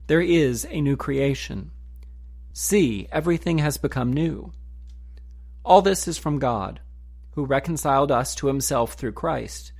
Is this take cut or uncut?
cut